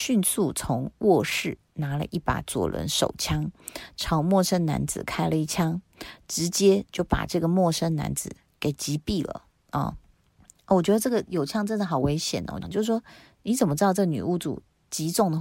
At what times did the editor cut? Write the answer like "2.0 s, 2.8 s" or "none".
12.6 s